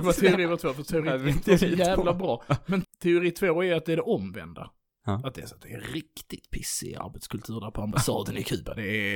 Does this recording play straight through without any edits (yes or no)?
no